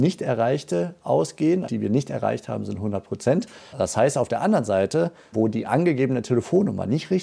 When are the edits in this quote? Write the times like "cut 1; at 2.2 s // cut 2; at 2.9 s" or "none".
cut 1; at 1.7 s // cut 2; at 3.7 s // cut 3; at 5.3 s